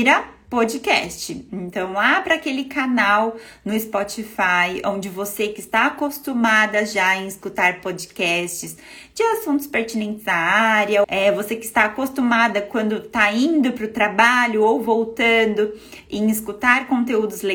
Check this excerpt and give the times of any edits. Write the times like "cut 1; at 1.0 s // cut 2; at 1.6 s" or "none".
cut 1; at 1.5 s // cut 2; at 11.0 s